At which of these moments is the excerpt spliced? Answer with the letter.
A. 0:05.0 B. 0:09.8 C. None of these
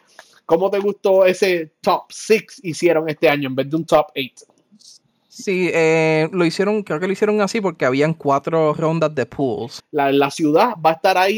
B